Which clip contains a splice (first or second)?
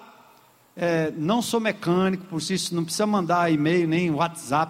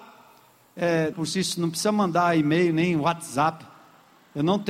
second